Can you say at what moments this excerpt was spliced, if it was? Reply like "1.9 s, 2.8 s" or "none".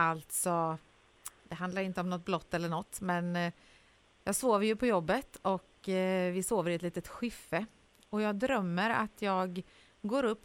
none

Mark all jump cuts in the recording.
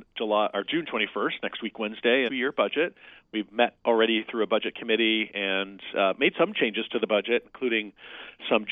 2.3 s

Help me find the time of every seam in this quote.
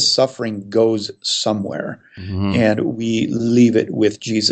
none

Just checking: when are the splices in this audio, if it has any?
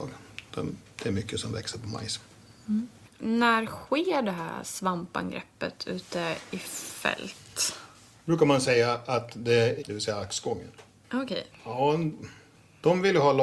9.8 s, 11.5 s

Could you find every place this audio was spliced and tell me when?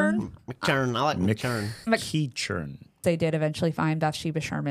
3.0 s

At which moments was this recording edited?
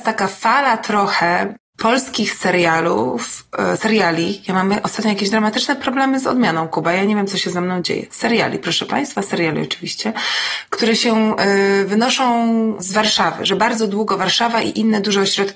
none

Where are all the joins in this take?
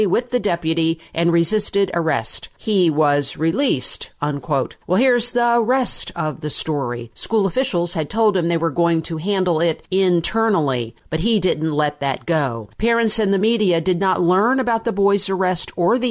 7.1 s, 12.7 s

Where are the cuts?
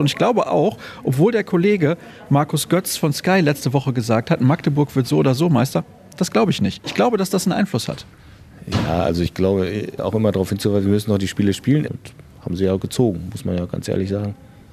10.0 s, 11.9 s

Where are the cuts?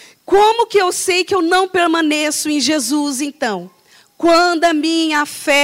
none

